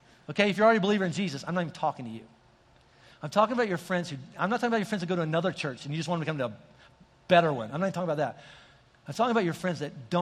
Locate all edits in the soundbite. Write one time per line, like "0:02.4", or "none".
none